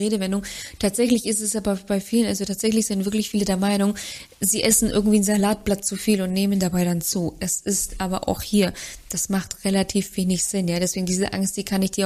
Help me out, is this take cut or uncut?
uncut